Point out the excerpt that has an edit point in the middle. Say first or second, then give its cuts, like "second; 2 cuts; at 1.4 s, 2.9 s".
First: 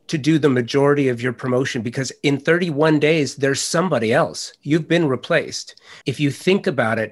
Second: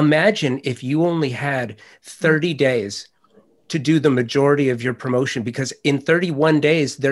first; 1 cut; at 6.0 s